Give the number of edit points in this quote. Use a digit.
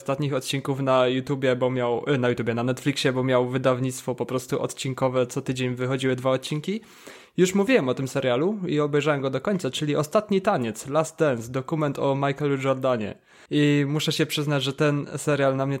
1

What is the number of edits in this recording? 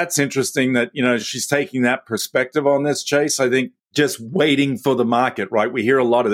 0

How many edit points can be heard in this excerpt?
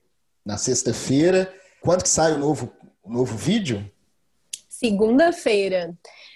1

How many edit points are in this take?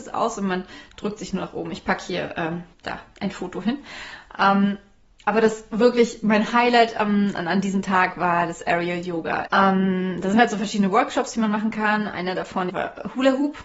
3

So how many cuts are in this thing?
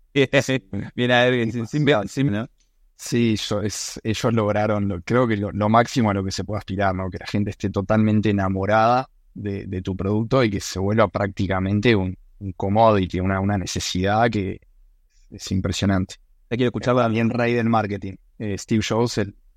1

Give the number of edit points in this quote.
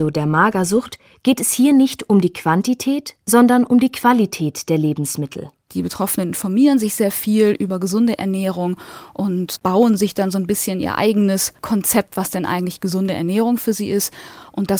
0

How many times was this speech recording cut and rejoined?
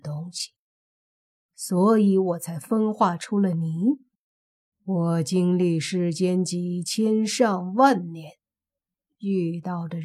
1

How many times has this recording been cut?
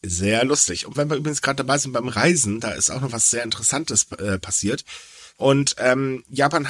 1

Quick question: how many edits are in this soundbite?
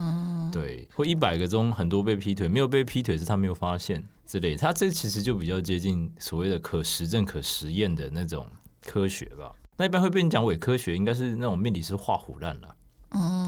1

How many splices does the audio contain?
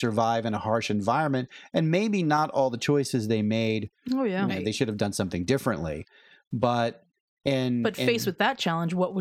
1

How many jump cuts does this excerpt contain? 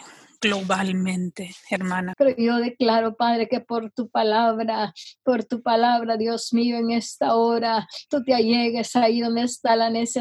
1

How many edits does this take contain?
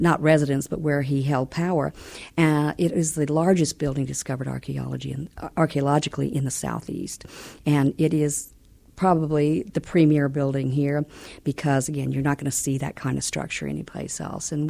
0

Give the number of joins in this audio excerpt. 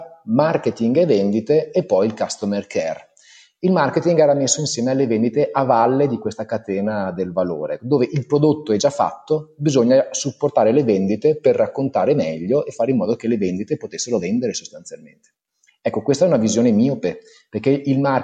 0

